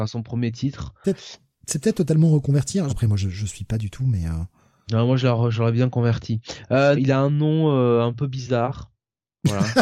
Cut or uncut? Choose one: cut